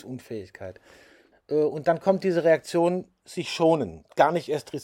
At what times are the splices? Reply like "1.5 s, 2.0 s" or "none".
1.3 s